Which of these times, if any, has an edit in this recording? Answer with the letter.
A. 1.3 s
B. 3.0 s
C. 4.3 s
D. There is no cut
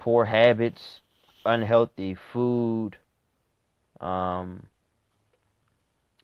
A